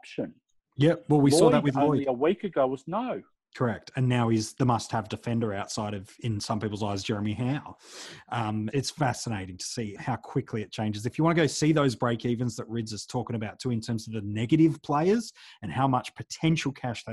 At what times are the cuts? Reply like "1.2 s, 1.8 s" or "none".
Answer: 8.7 s, 10.0 s